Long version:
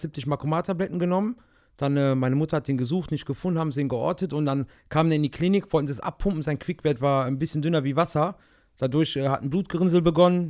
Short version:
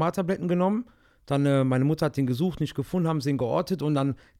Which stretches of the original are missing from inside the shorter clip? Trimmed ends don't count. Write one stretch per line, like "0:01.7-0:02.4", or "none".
none